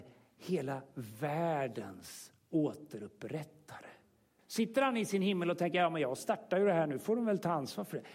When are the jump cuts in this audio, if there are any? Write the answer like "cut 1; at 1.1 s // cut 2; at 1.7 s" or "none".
cut 1; at 4.4 s